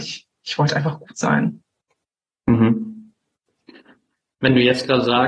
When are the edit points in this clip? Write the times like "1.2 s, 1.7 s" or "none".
none